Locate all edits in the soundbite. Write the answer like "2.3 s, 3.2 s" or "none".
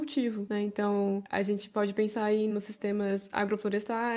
2.5 s